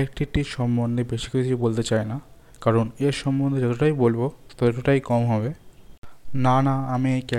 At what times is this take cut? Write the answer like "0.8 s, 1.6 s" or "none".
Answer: none